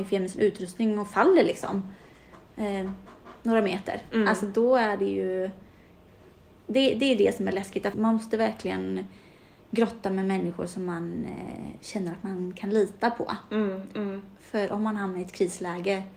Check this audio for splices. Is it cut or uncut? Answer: cut